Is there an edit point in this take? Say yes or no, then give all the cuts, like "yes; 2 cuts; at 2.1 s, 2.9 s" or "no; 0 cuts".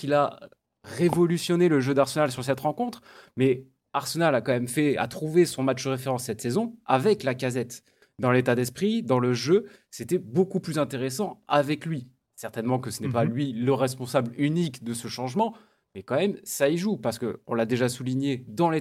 no; 0 cuts